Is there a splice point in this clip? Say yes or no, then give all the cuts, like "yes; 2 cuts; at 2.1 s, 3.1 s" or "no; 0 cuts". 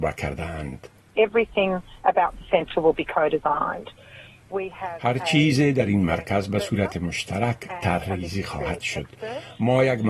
no; 0 cuts